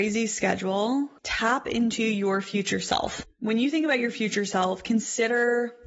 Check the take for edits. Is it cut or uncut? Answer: uncut